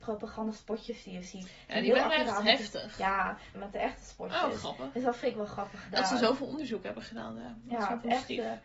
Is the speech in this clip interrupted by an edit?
yes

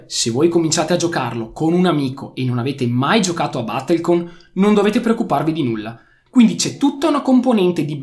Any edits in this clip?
yes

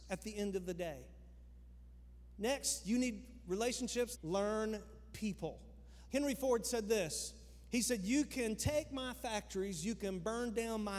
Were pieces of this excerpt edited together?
yes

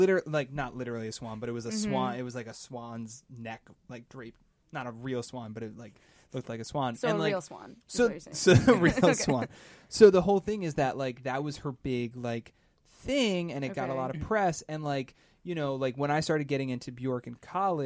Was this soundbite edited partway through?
no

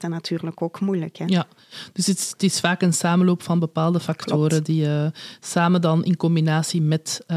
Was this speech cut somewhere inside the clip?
no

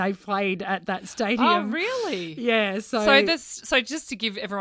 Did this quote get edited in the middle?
no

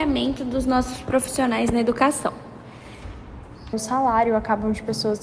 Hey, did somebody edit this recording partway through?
yes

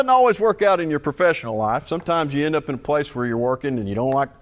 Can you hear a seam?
no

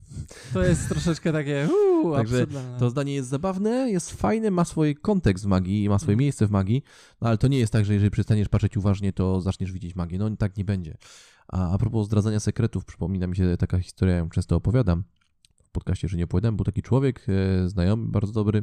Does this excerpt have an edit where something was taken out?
no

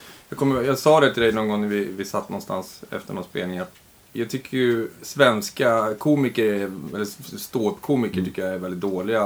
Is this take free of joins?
yes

